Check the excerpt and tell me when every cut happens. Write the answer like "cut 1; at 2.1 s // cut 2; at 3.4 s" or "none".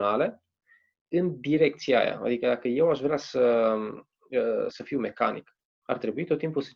cut 1; at 4.7 s